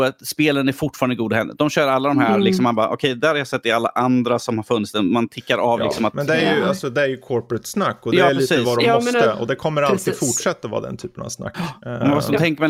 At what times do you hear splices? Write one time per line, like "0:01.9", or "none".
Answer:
none